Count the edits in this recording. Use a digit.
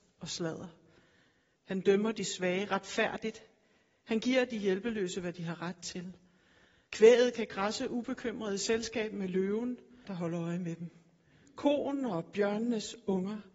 2